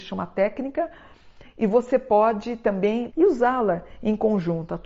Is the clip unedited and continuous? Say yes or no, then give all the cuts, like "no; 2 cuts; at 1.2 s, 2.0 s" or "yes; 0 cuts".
no; 1 cut; at 3.1 s